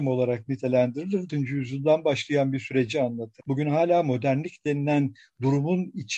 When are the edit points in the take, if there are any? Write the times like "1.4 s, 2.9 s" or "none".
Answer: 1.3 s, 3.4 s